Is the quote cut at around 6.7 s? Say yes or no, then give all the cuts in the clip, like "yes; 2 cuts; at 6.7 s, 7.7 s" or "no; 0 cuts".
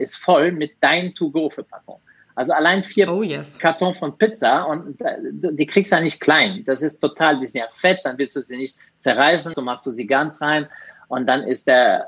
no; 1 cut; at 9.5 s